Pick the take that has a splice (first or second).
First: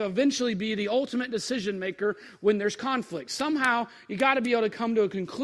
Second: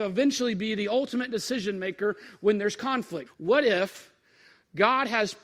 second